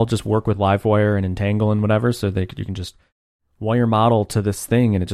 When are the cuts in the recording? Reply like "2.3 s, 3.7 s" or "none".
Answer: none